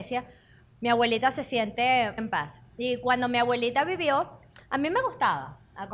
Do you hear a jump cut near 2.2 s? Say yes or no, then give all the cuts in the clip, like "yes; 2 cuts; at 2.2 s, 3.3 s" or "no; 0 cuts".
yes; 1 cut; at 2.2 s